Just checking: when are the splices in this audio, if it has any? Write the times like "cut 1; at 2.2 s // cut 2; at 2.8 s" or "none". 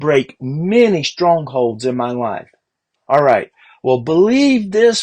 cut 1; at 3.0 s